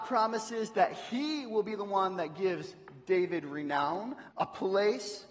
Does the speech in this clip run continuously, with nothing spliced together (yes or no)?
no